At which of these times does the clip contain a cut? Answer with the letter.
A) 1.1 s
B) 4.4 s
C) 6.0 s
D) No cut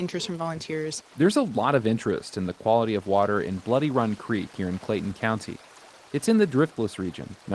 C